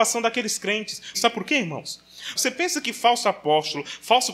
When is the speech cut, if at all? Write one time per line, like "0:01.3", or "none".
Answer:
0:01.1
0:02.4